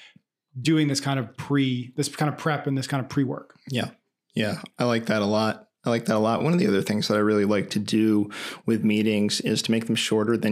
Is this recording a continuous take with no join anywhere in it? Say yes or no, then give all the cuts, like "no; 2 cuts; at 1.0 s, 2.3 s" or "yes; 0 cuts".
yes; 0 cuts